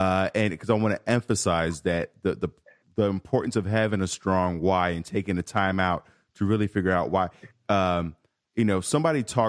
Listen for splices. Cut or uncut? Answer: uncut